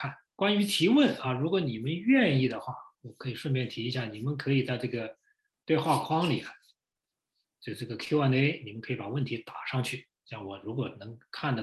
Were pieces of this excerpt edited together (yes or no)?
no